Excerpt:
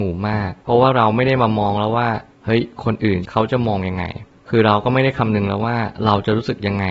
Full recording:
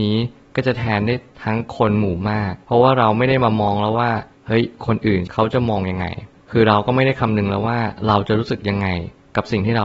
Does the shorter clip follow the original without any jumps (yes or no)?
yes